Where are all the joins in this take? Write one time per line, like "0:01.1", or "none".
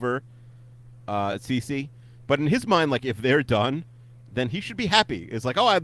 none